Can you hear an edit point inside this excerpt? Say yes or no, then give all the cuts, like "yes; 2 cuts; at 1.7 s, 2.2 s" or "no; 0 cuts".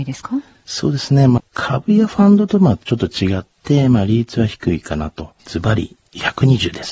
yes; 2 cuts; at 1.4 s, 5.4 s